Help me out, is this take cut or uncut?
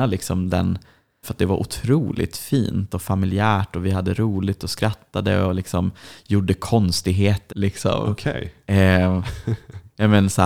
cut